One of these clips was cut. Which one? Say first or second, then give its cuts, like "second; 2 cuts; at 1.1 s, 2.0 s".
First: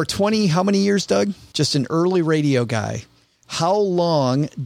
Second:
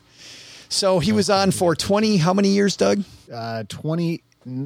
first; 1 cut; at 1.5 s